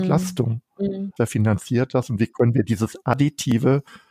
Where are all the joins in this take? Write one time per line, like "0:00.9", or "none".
0:01.2